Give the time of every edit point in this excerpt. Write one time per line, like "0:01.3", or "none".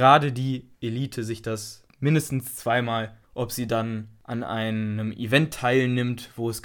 none